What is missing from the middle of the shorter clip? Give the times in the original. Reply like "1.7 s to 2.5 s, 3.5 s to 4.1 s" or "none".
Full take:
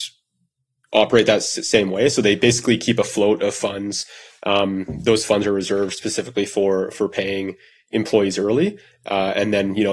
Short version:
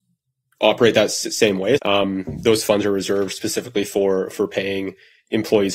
2.1 s to 4.4 s